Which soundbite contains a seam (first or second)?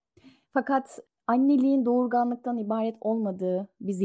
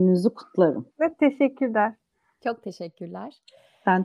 second